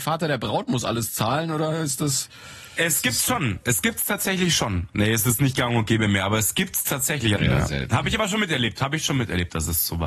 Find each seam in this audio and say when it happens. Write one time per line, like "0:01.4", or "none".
0:04.9
0:07.4